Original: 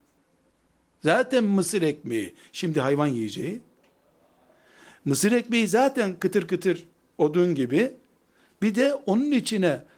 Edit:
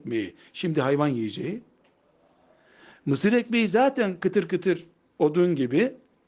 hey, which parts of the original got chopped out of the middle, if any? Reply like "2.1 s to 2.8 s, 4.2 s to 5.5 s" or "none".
none